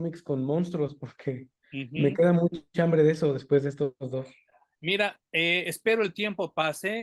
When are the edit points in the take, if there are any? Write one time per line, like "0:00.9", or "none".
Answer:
none

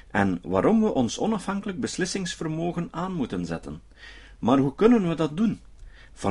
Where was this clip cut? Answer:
none

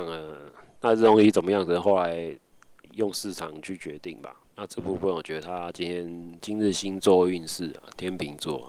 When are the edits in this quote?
0:04.4
0:06.4

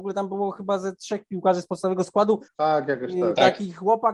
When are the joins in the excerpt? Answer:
0:02.5

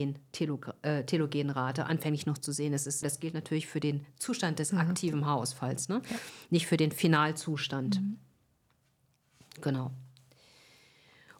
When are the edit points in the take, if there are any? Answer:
0:03.0

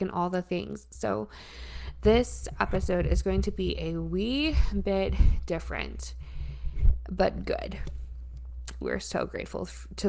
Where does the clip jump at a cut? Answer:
0:08.8

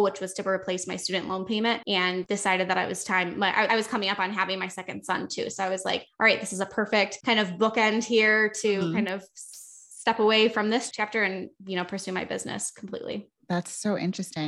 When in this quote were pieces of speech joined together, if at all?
0:03.7

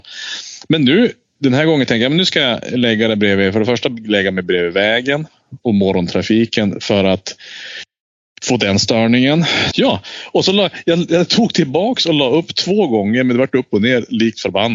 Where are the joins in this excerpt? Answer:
0:09.7

